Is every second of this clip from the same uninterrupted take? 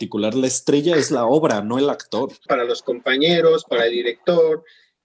no; 1 cut; at 2.5 s

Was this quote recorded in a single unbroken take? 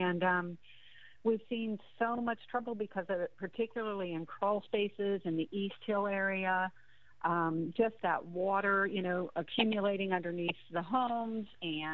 yes; 0 cuts

